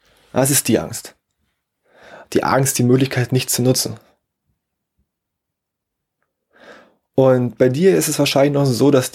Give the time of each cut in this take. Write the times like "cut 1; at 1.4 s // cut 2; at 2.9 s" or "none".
cut 1; at 2.2 s